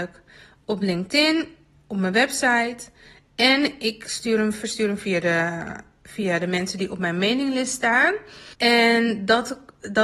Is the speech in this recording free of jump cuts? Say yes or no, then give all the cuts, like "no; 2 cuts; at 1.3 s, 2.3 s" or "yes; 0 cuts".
no; 1 cut; at 8.5 s